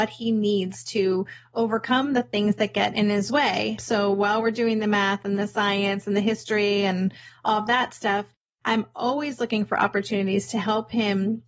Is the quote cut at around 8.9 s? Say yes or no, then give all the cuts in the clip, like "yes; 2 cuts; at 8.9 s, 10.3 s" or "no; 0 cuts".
no; 1 cut; at 3.8 s